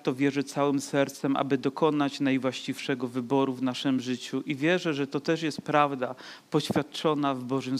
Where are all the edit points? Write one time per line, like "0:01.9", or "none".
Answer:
none